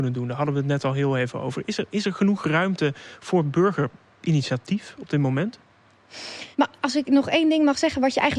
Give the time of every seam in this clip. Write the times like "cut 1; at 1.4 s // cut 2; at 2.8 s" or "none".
cut 1; at 6.5 s